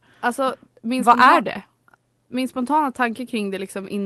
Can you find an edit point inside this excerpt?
no; 0 cuts

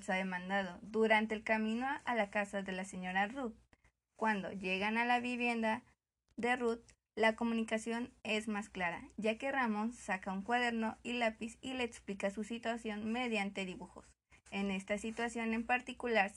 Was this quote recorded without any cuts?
no; 1 cut; at 4.1 s

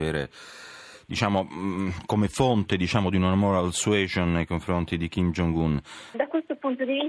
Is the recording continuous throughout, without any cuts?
no; 1 cut; at 6.1 s

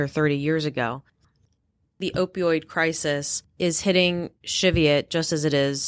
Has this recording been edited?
no; 0 cuts

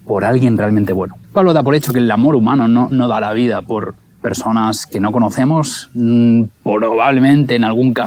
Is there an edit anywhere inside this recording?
yes; 1 cut; at 1.2 s

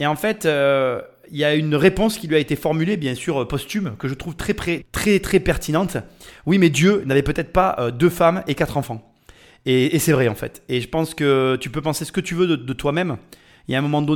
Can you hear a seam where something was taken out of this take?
yes; 1 cut; at 4.8 s

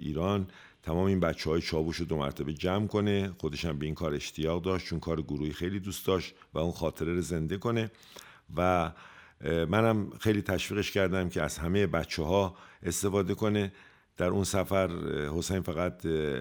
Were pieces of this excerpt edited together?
no; 0 cuts

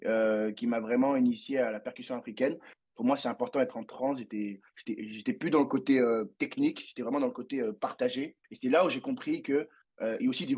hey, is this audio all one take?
no; 1 cut; at 2.8 s

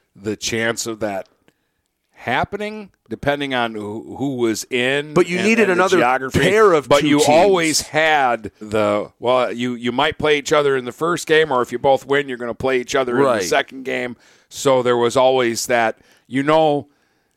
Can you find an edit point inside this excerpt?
yes; 1 cut; at 8.6 s

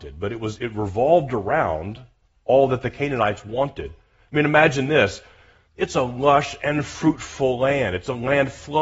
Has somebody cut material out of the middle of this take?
yes; 1 cut; at 5.6 s

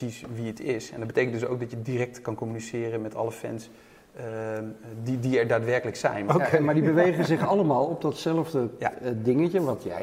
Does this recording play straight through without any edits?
no; 1 cut; at 6.3 s

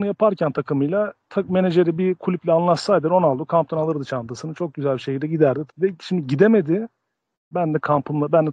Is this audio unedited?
no; 2 cuts; at 5.7 s, 7.5 s

